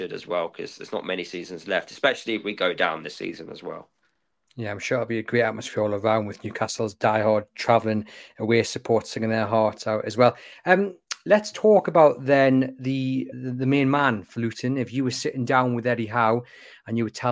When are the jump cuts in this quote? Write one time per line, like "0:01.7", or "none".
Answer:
0:13.3